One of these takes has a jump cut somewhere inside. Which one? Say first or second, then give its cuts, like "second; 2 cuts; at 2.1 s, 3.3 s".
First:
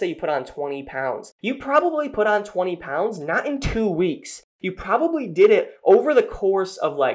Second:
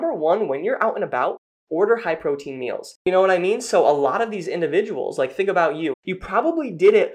second; 2 cuts; at 3.0 s, 5.9 s